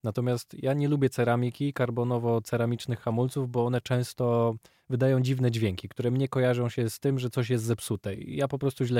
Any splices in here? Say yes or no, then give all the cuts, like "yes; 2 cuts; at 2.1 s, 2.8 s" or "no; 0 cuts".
no; 0 cuts